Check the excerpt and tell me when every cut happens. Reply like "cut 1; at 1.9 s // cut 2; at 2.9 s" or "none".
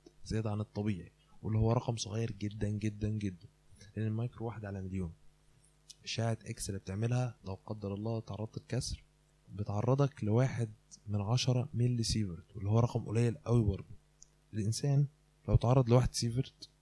cut 1; at 7.4 s